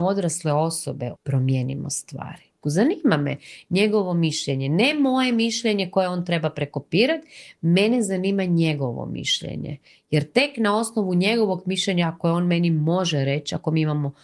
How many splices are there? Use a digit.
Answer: 2